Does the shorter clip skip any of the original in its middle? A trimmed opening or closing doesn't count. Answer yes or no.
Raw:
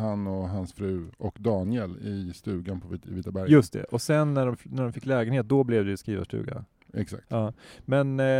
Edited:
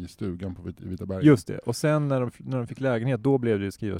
no